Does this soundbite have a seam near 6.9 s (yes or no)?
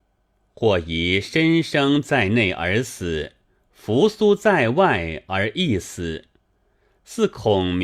no